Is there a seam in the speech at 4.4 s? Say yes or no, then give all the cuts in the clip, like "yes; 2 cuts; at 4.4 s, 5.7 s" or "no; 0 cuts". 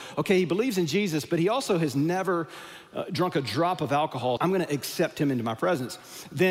yes; 1 cut; at 4.4 s